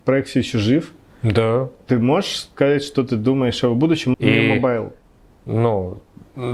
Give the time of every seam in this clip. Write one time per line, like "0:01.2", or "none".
0:04.1